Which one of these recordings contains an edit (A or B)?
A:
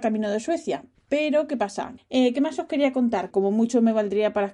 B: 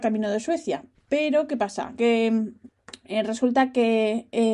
A